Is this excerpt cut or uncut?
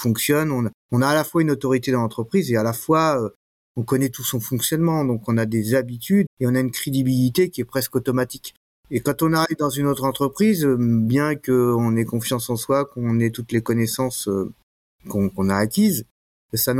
cut